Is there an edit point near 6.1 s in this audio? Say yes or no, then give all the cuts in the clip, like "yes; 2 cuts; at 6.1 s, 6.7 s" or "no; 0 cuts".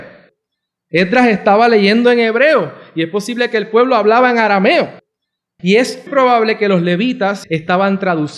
yes; 2 cuts; at 6.1 s, 7.4 s